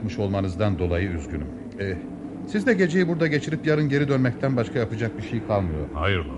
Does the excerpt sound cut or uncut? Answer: uncut